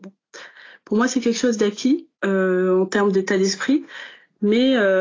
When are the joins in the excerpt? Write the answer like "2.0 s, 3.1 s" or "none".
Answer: 2.1 s